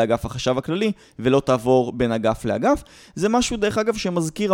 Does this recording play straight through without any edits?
yes; 0 cuts

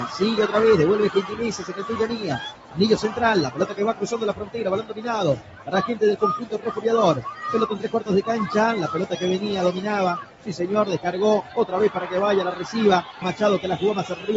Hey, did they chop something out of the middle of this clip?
yes; 1 cut; at 13.2 s

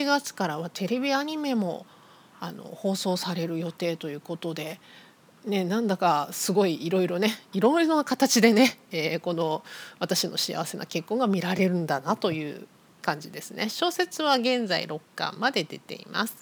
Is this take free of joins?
yes; 0 cuts

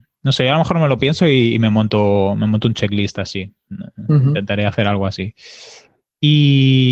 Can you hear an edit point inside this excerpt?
no; 0 cuts

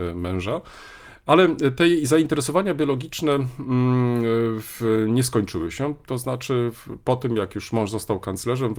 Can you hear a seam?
no; 0 cuts

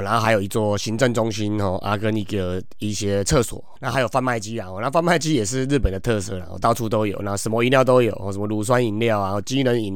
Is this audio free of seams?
no; 1 cut; at 3.8 s

